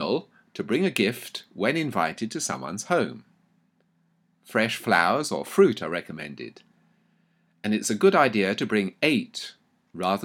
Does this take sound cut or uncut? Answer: uncut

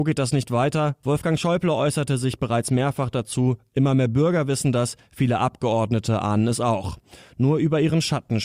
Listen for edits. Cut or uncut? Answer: uncut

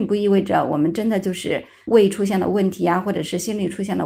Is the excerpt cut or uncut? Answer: uncut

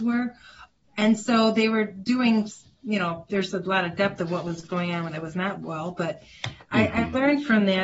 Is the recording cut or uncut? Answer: uncut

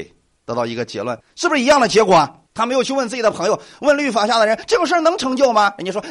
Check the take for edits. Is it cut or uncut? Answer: cut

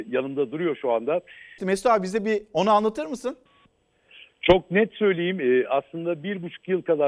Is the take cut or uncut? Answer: cut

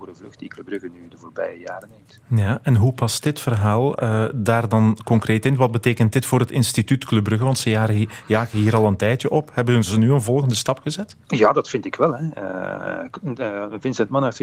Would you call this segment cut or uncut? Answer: cut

